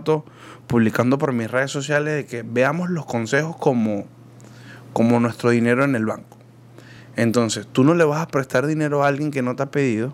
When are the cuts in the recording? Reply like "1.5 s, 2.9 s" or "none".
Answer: none